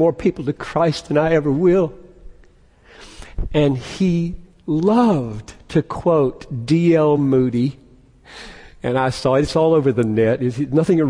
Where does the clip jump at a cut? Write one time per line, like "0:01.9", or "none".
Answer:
none